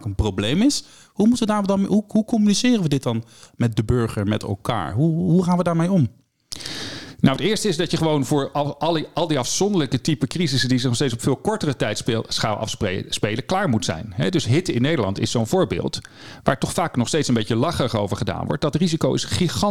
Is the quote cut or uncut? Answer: uncut